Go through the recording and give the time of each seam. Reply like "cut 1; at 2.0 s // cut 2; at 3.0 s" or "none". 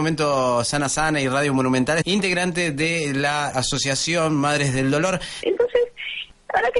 cut 1; at 2.0 s // cut 2; at 3.5 s // cut 3; at 5.4 s